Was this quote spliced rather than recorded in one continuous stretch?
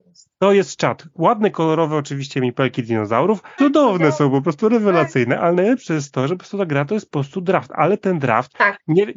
yes; 1 cut; at 3.6 s

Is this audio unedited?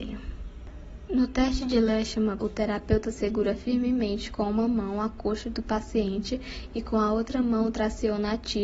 no; 2 cuts; at 1.1 s, 2.4 s

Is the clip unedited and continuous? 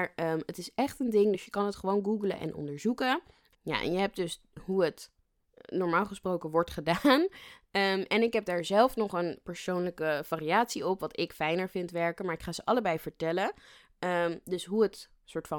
yes; 0 cuts

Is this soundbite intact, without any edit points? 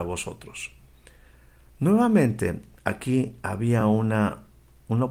yes; 0 cuts

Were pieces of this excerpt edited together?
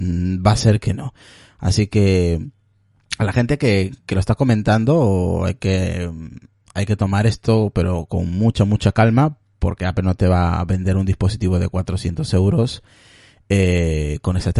no; 0 cuts

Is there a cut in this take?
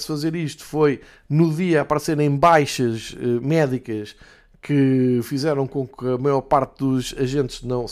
no; 0 cuts

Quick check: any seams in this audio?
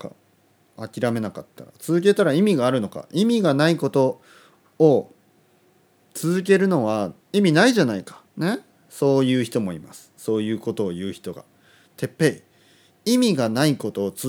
yes; 2 cuts; at 7.2 s, 8.3 s

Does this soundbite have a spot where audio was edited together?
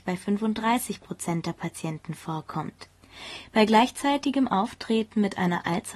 no; 0 cuts

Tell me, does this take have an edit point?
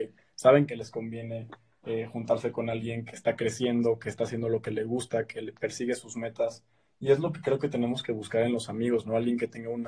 no; 0 cuts

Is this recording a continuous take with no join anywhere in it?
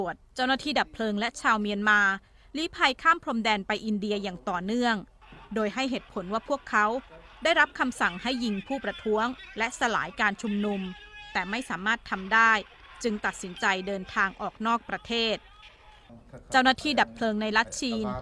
yes; 0 cuts

